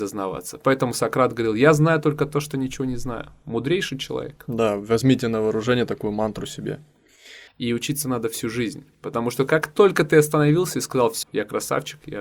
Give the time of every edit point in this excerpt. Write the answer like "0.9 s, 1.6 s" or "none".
7.5 s, 11.2 s